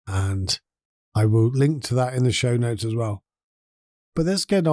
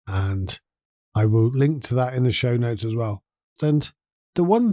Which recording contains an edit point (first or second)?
second